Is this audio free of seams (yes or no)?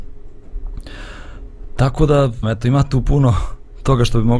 no